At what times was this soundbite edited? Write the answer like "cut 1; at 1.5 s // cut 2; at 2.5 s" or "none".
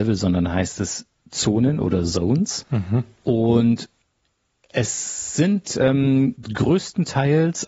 none